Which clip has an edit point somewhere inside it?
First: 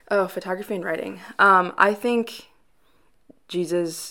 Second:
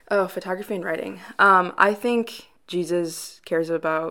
second; 1 cut; at 2.6 s

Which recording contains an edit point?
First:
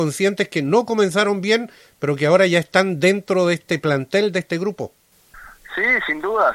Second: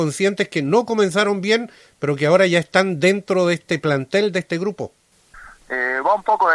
second; 1 cut; at 5.6 s

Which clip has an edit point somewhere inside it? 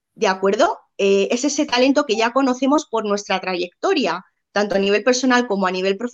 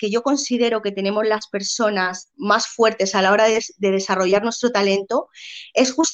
second; 1 cut; at 2.3 s

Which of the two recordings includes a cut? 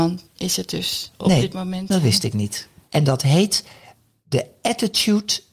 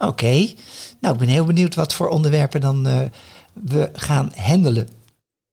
first; 1 cut; at 2.8 s

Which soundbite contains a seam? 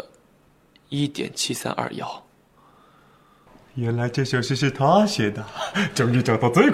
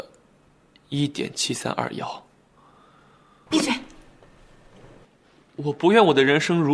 second; 1 cut; at 3.5 s

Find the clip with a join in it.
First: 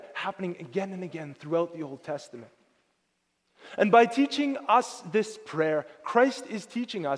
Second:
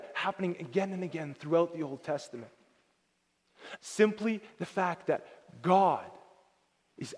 second; 1 cut; at 3.8 s

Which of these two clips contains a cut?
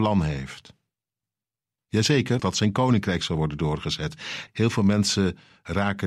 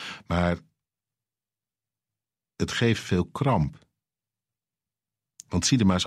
first; 2 cuts; at 2.4 s, 4.5 s

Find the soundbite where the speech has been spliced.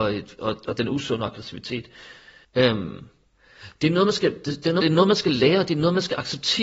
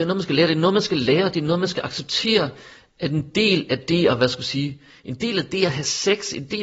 first; 2 cuts; at 2.4 s, 4.8 s

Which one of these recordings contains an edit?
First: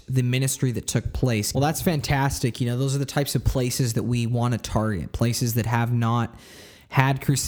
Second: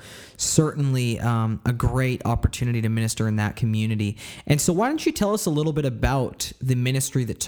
first; 1 cut; at 1.5 s

